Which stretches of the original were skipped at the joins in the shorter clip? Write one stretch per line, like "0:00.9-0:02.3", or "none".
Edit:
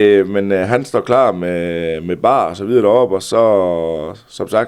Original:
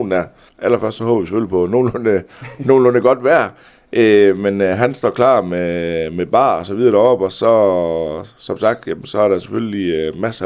none